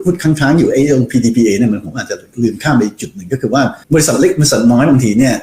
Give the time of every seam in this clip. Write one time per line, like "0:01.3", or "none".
0:03.8